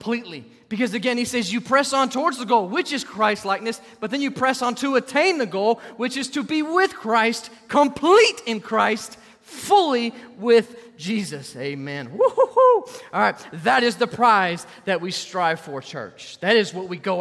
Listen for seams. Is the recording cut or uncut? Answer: uncut